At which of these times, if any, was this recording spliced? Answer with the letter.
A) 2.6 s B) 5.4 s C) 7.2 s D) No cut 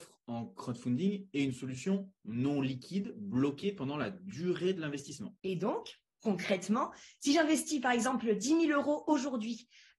B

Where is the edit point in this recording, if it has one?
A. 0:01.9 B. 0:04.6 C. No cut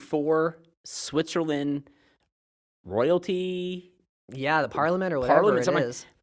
C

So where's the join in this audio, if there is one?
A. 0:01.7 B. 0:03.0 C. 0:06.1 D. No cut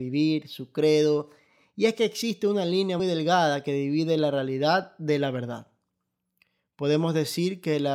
B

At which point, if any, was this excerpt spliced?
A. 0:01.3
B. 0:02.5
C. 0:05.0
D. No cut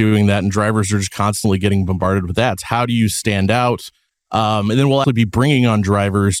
C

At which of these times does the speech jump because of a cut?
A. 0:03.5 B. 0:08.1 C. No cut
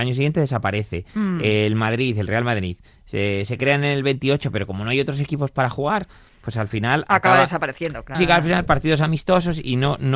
B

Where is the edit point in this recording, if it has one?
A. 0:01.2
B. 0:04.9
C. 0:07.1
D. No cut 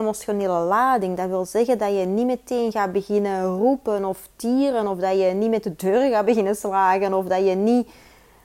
D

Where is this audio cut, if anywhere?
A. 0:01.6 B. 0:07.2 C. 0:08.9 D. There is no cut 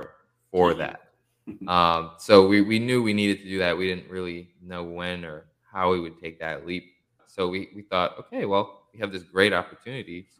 B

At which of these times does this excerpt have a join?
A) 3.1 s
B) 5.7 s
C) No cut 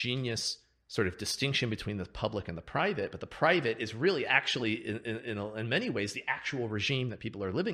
C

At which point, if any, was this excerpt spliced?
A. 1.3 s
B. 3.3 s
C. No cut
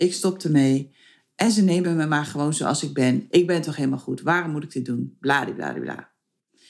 C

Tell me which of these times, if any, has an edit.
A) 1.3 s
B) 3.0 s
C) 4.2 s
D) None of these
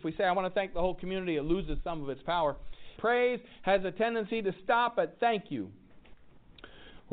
B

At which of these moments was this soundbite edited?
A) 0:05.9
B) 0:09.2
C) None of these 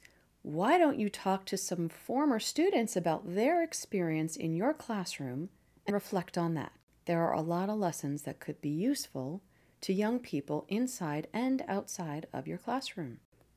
A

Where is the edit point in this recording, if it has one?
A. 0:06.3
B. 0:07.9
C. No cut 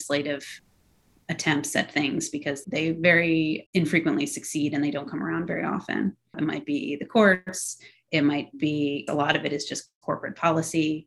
A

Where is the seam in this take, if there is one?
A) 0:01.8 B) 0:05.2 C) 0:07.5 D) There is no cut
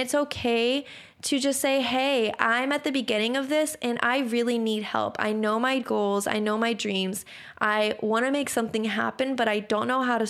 B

